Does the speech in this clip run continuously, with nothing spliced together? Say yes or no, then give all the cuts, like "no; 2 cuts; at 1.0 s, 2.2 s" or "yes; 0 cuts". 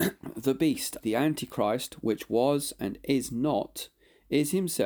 no; 1 cut; at 1.0 s